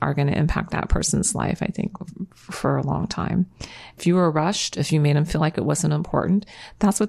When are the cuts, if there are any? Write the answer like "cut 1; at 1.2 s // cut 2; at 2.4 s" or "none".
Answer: cut 1; at 4.0 s